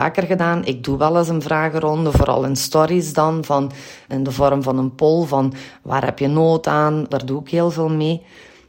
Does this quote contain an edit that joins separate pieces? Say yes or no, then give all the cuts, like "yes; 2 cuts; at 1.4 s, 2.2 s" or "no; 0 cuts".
yes; 2 cuts; at 4.1 s, 7.1 s